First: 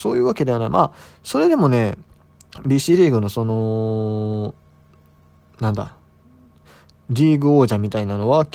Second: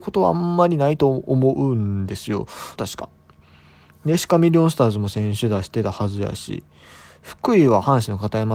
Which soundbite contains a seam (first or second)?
second